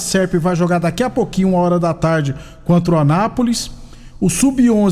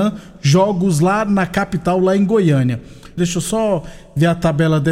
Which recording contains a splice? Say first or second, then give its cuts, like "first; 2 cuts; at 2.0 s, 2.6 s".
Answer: second; 1 cut; at 3.2 s